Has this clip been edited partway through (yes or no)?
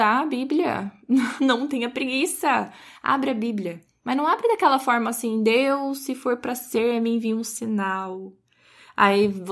no